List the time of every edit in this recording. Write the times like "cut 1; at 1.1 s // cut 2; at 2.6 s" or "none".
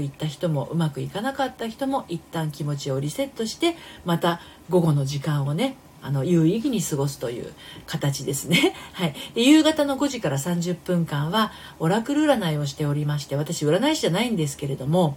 none